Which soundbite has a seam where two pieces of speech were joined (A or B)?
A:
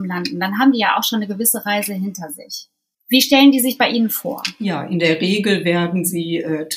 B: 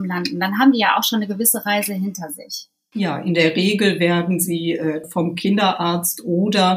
B